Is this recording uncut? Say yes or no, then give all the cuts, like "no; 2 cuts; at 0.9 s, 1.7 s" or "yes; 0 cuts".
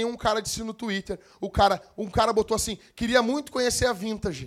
yes; 0 cuts